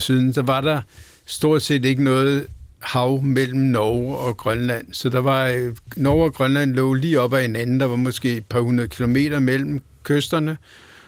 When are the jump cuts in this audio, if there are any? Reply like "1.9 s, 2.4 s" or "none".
none

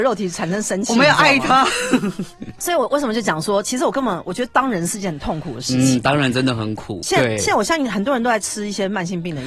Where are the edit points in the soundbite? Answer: 7.0 s

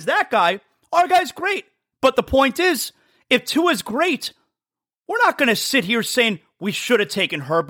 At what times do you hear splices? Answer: 1.9 s

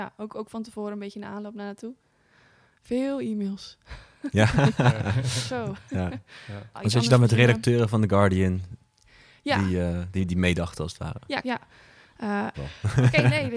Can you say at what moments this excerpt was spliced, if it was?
6.7 s, 11.4 s, 12.5 s

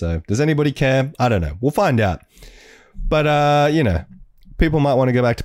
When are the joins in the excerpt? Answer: none

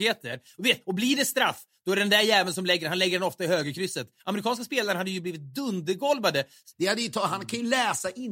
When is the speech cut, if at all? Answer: 4.2 s, 6.7 s

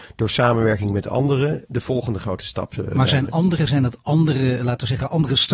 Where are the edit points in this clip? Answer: none

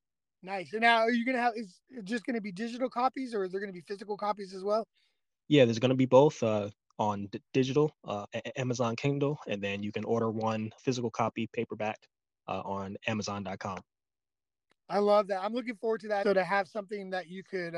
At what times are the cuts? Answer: 10.8 s, 16.2 s

